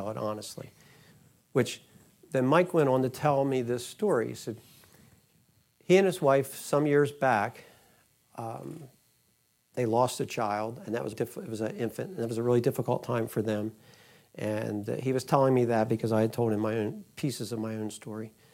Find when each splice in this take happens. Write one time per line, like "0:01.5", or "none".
0:11.1